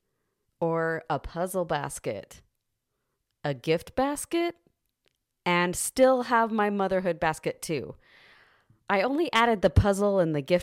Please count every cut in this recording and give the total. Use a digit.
0